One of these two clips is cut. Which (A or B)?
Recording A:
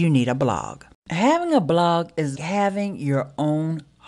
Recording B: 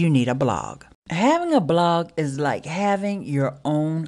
A